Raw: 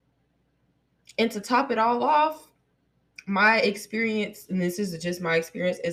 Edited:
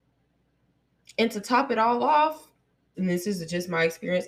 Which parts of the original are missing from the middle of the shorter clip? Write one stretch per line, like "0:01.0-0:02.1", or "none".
0:02.9-0:04.5